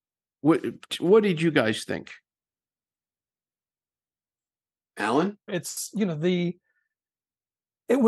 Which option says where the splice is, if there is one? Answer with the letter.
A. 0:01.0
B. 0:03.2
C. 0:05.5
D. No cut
C